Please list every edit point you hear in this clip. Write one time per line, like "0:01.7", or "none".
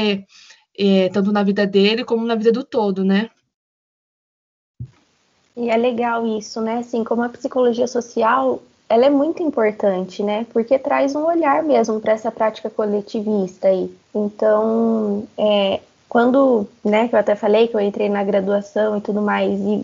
0:14.0